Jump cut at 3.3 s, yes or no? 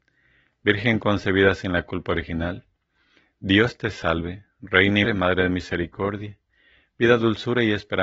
no